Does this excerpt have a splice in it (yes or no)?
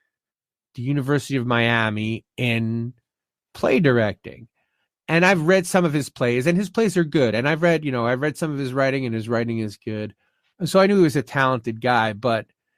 no